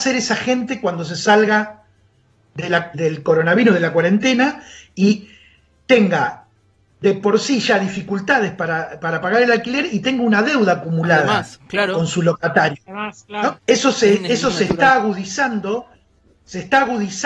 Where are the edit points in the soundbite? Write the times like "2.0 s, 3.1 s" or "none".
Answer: 2.9 s, 13.6 s